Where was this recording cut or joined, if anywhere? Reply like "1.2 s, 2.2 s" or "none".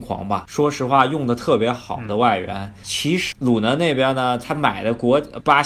3.3 s